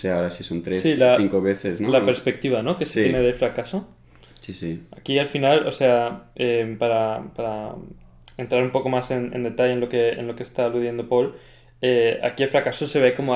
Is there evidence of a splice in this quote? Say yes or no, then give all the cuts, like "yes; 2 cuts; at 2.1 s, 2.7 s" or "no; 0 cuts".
no; 0 cuts